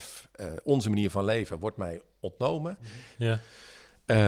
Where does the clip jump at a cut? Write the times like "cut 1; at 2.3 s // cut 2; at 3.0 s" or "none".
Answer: cut 1; at 3.2 s

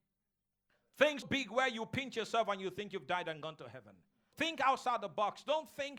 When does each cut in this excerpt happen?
cut 1; at 1.2 s // cut 2; at 4.3 s

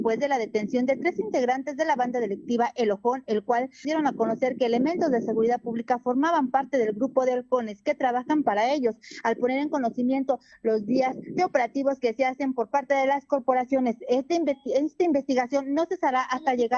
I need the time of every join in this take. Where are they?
cut 1; at 3.8 s

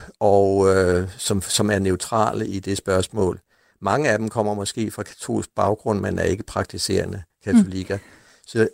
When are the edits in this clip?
none

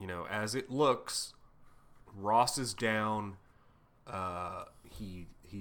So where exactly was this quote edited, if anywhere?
none

